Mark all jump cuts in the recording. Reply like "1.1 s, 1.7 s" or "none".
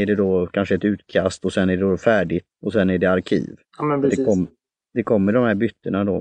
2.5 s, 3.6 s